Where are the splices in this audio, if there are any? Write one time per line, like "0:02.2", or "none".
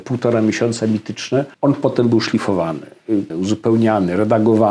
0:01.5
0:03.3